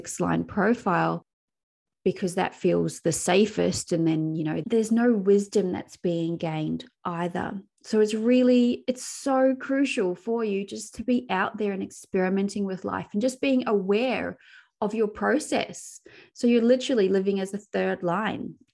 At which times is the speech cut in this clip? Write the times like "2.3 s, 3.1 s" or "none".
4.6 s

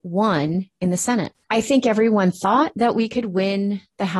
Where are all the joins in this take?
1.5 s

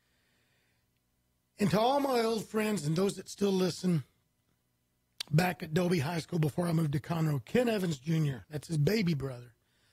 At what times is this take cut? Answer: 8.4 s

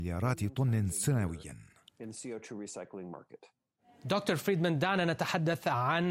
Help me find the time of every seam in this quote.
none

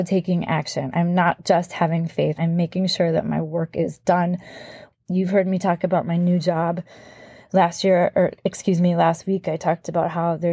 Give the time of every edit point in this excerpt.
2.4 s, 4.9 s

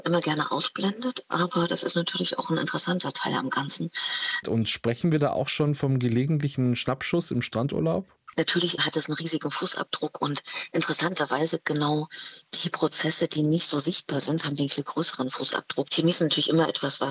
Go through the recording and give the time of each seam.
4.4 s, 15.9 s

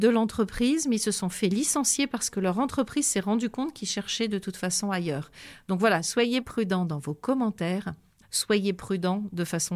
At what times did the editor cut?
8.2 s

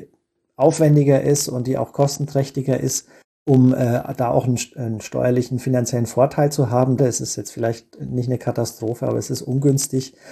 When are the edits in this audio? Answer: 7.0 s

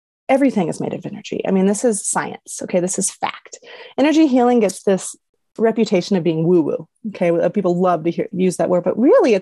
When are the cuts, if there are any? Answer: 8.3 s

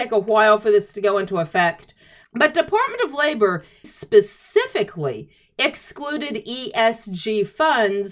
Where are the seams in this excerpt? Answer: 2.2 s, 3.8 s

